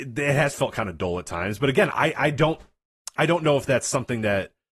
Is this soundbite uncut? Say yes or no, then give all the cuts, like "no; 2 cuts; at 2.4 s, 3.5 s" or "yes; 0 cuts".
yes; 0 cuts